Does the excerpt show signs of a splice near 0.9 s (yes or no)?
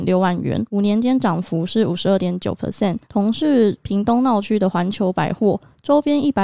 no